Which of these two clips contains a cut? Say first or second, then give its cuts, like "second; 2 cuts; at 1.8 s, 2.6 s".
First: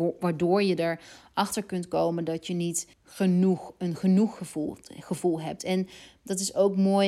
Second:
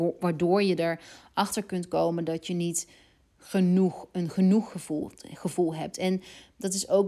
first; 1 cut; at 2.9 s